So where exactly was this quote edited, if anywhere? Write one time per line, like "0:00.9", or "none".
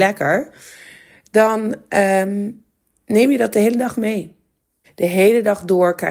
0:04.8